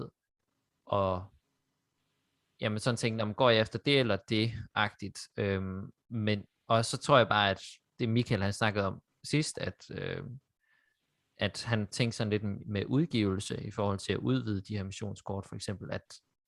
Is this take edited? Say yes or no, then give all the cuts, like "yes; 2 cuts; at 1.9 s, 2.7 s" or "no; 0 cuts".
no; 0 cuts